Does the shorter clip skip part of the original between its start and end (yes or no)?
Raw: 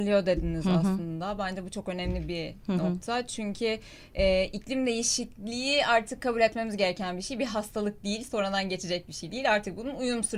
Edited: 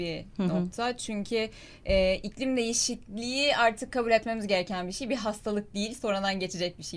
no